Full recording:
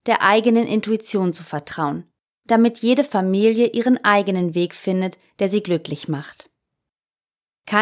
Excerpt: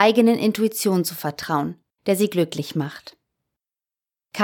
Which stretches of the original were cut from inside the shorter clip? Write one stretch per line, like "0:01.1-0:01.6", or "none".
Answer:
0:02.3-0:05.3